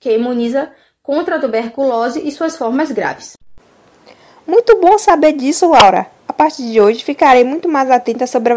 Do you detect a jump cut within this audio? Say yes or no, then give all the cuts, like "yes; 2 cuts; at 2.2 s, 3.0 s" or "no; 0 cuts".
no; 0 cuts